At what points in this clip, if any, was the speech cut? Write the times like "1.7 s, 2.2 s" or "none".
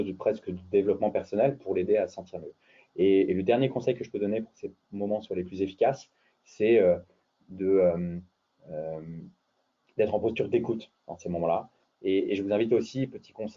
11.9 s